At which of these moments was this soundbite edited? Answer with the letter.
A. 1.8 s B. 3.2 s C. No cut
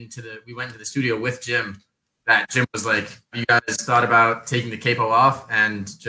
B